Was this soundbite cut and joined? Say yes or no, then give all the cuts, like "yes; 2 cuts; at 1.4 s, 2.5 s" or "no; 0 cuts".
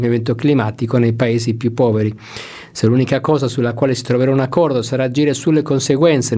yes; 1 cut; at 2.7 s